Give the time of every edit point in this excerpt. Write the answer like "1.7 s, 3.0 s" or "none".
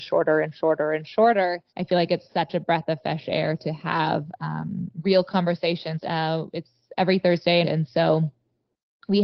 1.7 s, 6.0 s, 7.6 s

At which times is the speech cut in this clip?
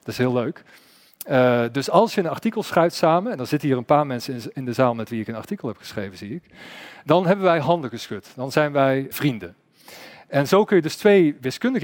9.1 s

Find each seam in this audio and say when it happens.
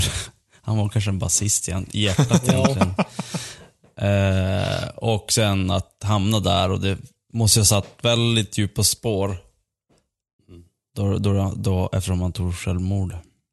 none

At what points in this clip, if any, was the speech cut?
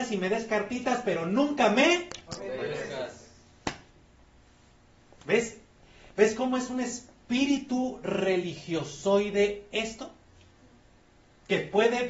none

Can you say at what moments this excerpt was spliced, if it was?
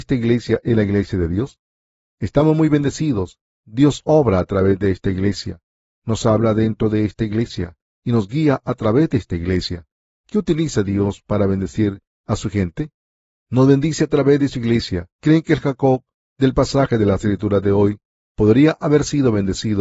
10.1 s, 15.1 s

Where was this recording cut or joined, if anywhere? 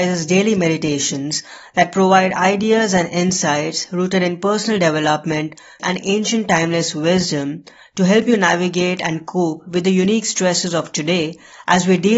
5.8 s

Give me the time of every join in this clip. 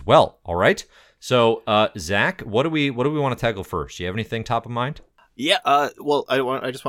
none

